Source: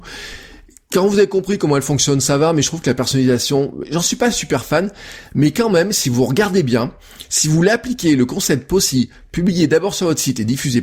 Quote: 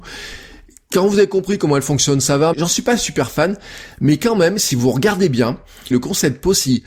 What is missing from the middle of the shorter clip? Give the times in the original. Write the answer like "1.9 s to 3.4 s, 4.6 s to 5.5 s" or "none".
2.5 s to 3.9 s, 7.2 s to 8.2 s